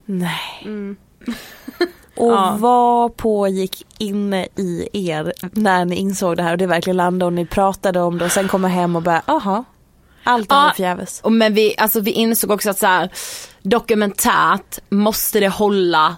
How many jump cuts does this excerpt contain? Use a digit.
1